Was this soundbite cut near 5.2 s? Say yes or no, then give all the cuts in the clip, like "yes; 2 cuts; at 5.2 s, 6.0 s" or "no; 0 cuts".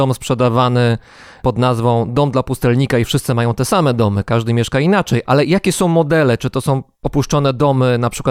yes; 1 cut; at 5.2 s